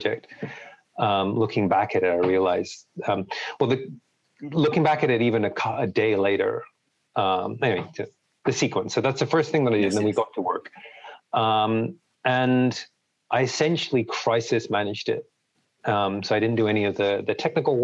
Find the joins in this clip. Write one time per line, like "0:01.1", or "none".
none